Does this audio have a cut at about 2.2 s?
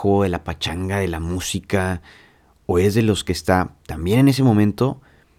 no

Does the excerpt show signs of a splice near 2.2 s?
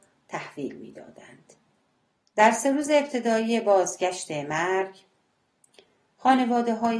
yes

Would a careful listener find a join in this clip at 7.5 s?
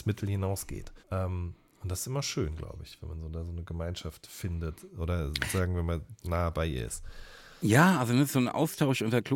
no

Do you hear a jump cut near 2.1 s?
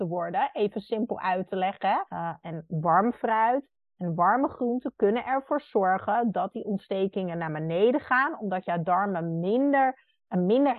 yes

